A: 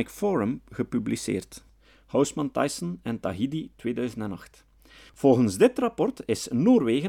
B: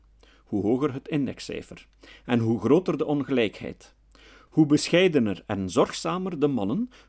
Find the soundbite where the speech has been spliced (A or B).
A